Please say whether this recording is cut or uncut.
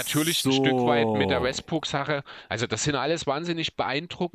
cut